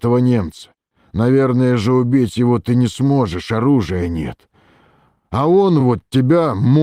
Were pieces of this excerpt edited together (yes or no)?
no